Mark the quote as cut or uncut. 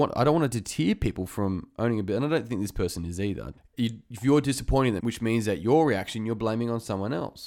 cut